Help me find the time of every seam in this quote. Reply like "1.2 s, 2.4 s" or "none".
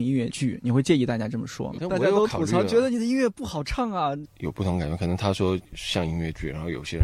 1.8 s, 4.3 s